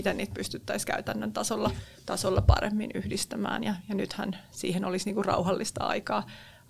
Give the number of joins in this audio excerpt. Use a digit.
0